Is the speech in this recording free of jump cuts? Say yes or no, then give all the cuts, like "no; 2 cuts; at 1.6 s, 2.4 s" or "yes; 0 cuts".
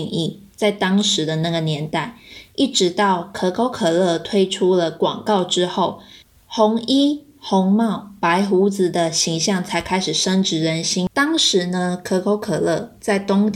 yes; 0 cuts